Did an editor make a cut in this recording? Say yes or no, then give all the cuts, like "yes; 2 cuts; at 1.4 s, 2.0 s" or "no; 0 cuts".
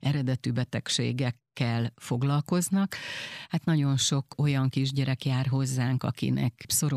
no; 0 cuts